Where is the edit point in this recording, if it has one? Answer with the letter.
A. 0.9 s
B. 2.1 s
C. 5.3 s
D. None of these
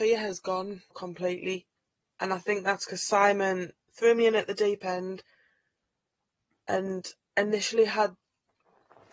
A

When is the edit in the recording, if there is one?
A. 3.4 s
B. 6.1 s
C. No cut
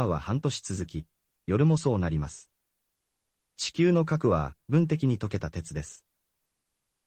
A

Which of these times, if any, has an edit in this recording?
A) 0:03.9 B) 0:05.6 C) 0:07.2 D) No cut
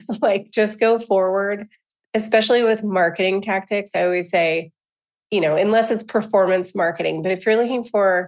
D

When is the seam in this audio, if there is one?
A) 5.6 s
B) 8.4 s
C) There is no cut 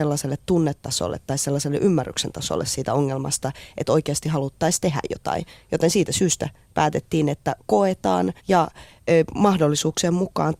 B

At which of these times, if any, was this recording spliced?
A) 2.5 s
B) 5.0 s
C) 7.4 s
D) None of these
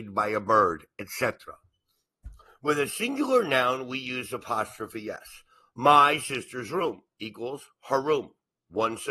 D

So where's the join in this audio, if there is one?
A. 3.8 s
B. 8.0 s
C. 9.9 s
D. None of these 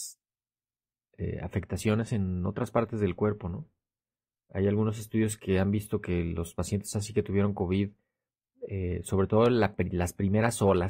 D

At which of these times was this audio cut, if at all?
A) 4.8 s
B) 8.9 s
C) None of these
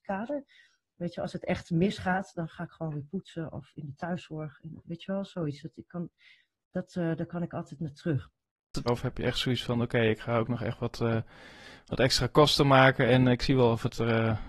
B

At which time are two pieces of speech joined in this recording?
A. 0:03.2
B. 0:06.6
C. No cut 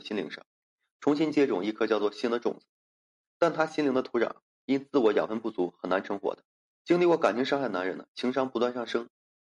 B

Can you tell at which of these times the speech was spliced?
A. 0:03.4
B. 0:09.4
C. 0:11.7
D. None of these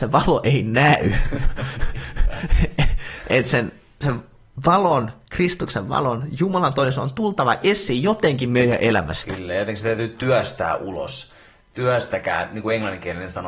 D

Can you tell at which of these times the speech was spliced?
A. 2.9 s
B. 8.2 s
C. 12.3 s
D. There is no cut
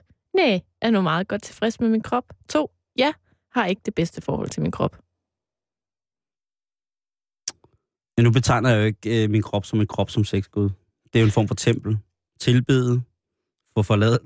C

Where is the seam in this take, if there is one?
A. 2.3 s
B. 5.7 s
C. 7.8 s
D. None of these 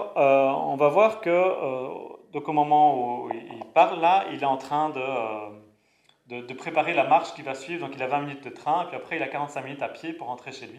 D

